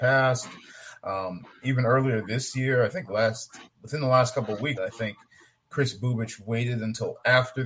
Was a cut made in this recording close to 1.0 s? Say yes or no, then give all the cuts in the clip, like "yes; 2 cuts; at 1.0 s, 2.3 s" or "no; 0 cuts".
no; 1 cut; at 4.8 s